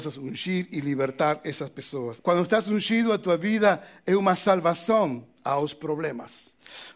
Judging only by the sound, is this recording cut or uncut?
cut